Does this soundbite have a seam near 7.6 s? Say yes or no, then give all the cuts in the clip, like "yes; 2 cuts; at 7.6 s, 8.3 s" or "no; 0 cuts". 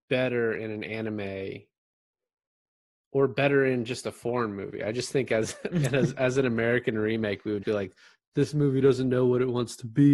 yes; 2 cuts; at 5.7 s, 7.6 s